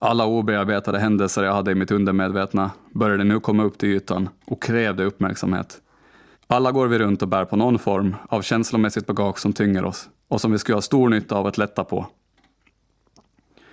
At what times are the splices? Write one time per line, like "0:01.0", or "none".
0:06.3
0:10.2